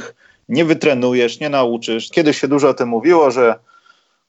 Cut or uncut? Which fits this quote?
cut